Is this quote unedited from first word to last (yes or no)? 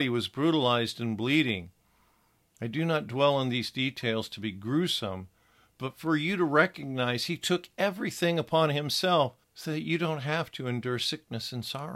no